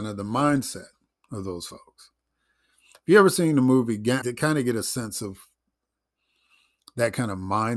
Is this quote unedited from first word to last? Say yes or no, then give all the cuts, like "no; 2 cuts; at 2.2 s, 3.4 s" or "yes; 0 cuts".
no; 1 cut; at 4.2 s